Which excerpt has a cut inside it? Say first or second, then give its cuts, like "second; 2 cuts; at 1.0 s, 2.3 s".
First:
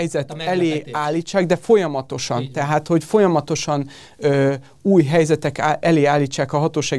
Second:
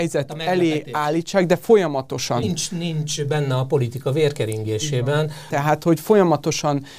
second; 2 cuts; at 2.4 s, 5.5 s